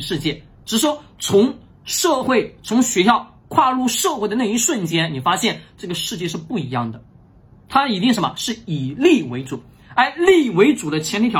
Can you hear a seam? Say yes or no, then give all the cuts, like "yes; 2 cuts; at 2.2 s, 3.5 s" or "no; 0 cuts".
no; 0 cuts